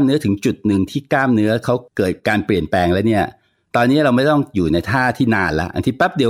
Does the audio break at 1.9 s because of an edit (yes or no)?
yes